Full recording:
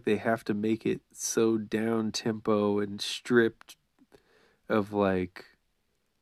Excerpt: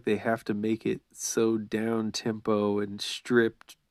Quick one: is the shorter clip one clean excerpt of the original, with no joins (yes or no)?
yes